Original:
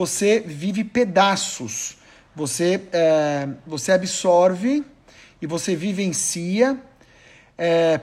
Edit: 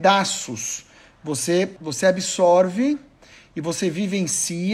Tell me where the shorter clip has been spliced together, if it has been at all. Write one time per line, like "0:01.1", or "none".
0:01.8